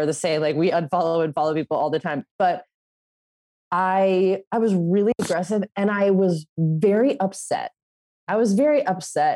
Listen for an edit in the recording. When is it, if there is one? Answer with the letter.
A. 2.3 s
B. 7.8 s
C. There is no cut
C